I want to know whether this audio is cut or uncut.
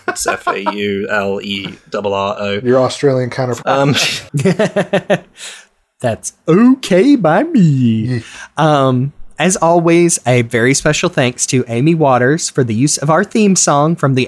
cut